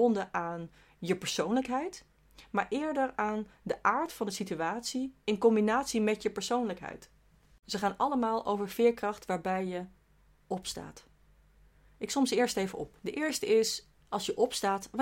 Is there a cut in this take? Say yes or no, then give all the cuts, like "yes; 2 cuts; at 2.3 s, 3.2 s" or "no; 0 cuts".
yes; 1 cut; at 13.0 s